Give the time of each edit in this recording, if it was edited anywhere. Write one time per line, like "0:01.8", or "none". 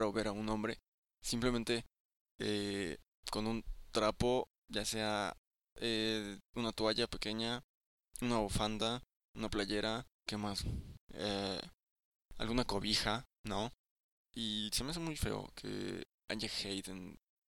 0:10.3
0:14.2